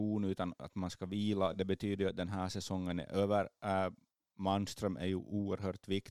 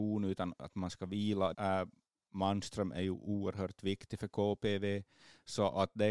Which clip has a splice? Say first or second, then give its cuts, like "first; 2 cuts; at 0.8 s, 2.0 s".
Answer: second; 1 cut; at 1.5 s